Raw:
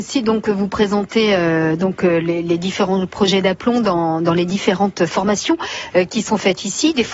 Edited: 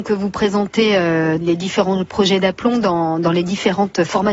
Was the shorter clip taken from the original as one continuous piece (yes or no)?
no